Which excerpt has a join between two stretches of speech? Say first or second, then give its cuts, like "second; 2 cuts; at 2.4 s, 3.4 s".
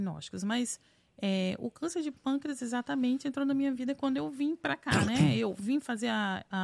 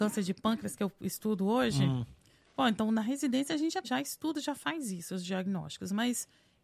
second; 1 cut; at 3.8 s